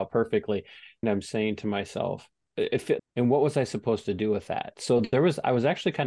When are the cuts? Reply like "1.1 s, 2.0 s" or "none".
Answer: 1.0 s, 3.0 s